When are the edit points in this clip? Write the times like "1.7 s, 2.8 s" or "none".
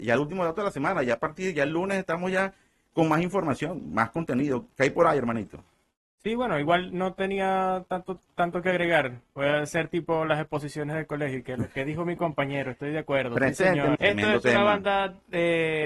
14.0 s